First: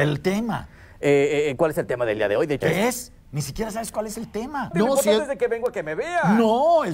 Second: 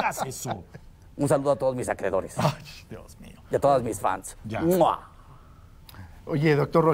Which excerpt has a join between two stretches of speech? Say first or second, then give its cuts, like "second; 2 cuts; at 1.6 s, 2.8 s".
first; 2 cuts; at 2.6 s, 4.7 s